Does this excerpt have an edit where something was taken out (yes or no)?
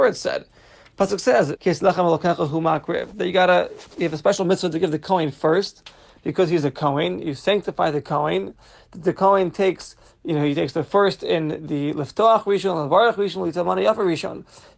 yes